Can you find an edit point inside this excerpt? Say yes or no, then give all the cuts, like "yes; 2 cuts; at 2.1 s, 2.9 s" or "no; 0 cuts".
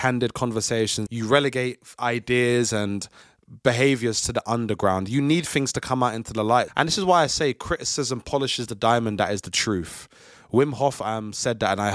yes; 2 cuts; at 1.1 s, 6.7 s